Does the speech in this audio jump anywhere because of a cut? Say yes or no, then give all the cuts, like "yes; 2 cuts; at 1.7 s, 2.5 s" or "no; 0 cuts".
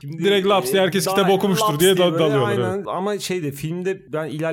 no; 0 cuts